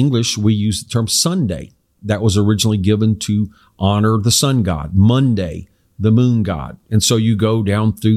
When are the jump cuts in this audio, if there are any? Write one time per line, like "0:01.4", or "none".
none